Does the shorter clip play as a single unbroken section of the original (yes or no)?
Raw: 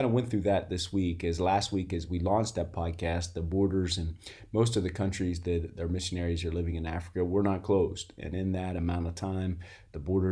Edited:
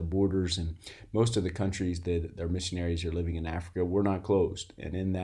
yes